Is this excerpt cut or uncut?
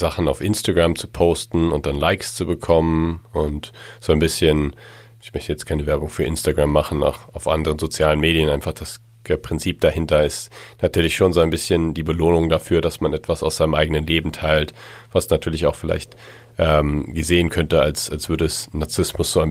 uncut